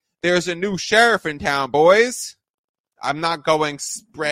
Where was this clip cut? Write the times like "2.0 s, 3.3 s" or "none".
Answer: 2.9 s